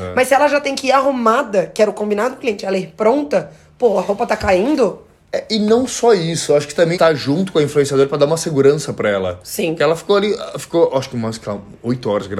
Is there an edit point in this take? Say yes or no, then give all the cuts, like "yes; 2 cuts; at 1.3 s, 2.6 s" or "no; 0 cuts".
yes; 1 cut; at 6.9 s